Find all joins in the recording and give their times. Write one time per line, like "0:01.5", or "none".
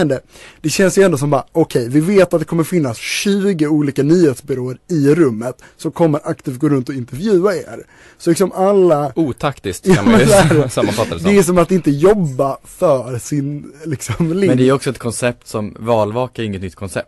none